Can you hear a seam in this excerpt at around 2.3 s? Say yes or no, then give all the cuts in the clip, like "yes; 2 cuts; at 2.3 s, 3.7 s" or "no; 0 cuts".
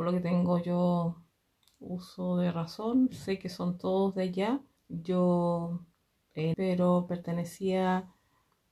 no; 2 cuts; at 4.8 s, 6.5 s